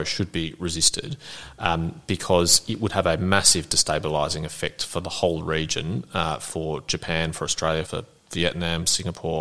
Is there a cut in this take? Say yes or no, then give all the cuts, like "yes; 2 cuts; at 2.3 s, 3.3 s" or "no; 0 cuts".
yes; 1 cut; at 7.9 s